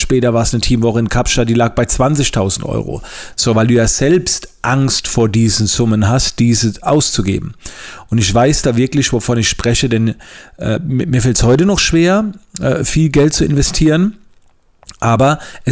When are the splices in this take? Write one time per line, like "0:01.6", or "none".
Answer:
0:03.3